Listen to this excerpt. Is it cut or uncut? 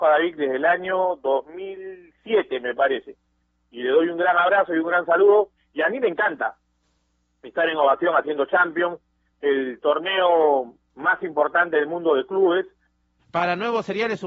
cut